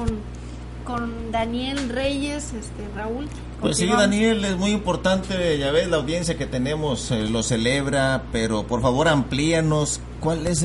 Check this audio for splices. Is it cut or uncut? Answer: uncut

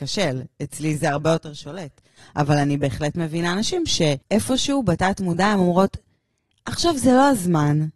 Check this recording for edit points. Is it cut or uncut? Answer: cut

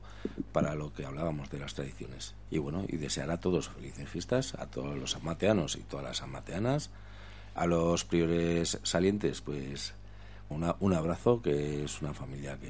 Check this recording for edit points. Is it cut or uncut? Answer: cut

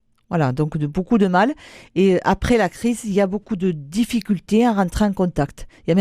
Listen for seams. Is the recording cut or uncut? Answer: uncut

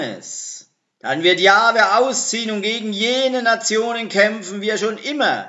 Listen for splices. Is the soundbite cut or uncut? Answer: cut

